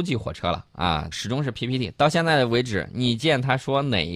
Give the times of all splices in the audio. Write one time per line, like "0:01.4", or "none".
0:01.1